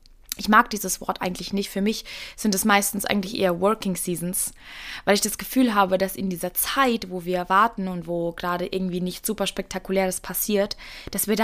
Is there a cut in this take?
no; 0 cuts

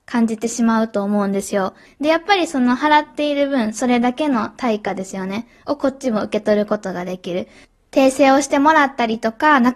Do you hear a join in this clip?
yes; 1 cut; at 1.9 s

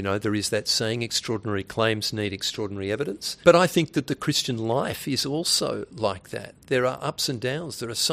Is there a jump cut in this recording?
yes; 1 cut; at 3.4 s

